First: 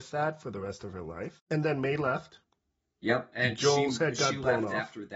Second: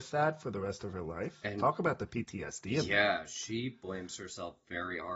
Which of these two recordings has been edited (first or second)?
first